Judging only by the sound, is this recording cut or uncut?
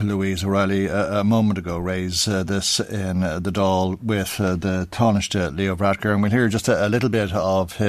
uncut